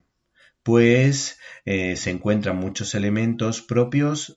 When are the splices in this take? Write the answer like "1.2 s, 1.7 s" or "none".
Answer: none